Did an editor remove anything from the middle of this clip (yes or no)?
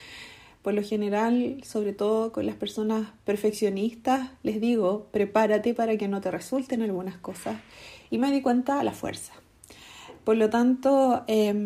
yes